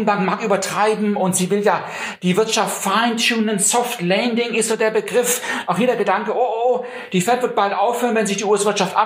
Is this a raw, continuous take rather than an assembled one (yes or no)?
yes